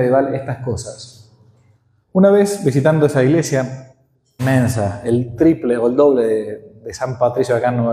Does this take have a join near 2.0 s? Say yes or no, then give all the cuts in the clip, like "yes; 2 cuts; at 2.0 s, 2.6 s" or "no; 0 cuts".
yes; 2 cuts; at 2.0 s, 4.4 s